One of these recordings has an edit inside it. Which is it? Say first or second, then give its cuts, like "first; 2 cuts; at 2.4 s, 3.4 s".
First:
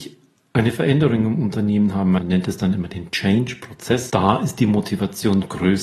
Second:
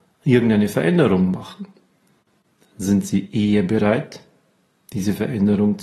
first; 2 cuts; at 2.2 s, 4.1 s